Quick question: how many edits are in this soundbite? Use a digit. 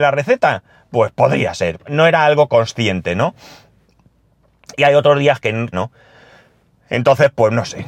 2